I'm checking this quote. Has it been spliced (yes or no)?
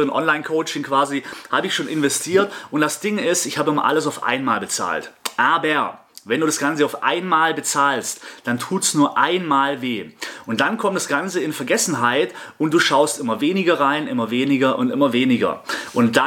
no